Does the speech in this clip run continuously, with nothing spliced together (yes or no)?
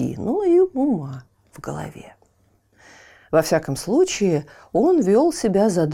yes